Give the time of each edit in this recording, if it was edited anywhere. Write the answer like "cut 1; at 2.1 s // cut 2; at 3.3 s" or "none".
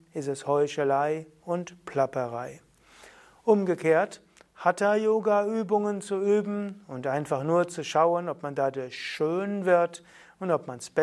none